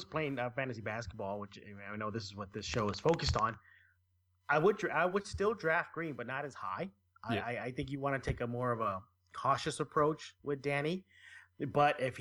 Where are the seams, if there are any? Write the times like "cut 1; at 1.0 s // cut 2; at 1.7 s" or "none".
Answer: none